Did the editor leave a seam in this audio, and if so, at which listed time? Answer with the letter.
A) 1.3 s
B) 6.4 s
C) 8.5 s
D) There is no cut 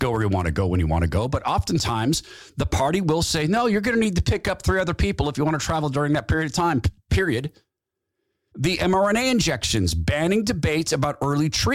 C